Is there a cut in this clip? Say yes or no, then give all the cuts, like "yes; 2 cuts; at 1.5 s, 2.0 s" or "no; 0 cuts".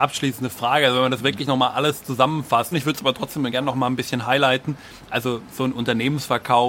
yes; 1 cut; at 2.7 s